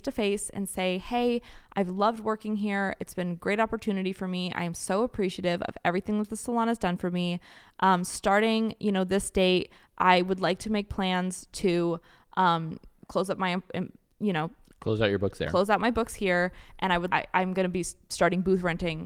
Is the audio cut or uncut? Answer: cut